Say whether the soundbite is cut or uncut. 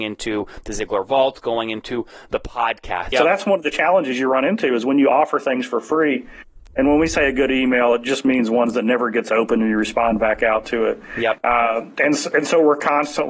cut